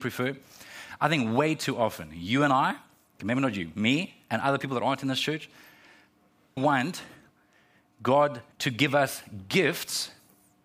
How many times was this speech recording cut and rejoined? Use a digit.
2